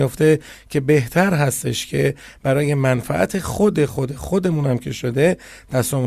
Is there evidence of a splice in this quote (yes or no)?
no